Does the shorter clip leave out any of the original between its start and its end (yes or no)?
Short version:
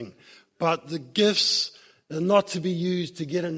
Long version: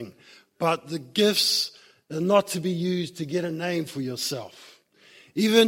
no